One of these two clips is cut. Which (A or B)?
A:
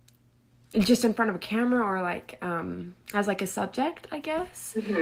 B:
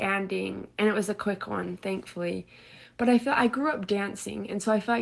A